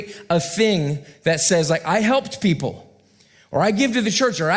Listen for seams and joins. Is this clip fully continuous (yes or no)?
yes